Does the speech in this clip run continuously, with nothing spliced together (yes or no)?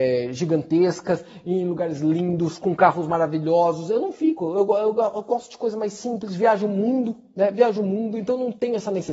yes